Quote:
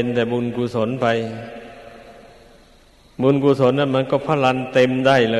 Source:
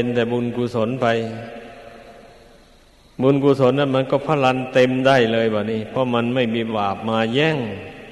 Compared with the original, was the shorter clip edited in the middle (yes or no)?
no